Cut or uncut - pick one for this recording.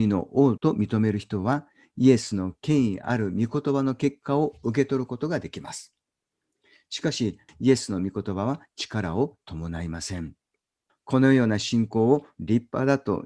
cut